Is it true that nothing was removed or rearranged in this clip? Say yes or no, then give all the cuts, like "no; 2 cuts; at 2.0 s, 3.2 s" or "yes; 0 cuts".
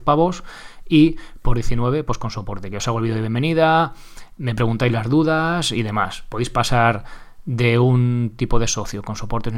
yes; 0 cuts